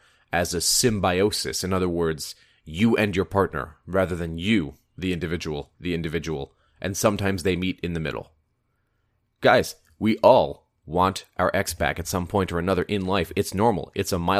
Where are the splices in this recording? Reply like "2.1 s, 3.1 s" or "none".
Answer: 5.7 s, 9.2 s